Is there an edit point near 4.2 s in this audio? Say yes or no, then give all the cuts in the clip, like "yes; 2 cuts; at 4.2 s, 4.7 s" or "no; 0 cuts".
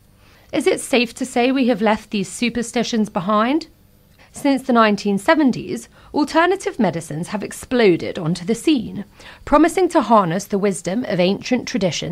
yes; 1 cut; at 4.2 s